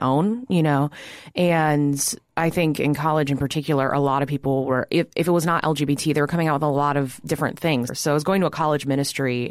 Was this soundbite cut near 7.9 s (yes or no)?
yes